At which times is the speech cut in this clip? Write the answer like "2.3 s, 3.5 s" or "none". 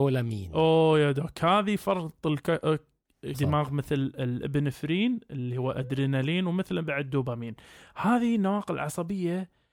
3.3 s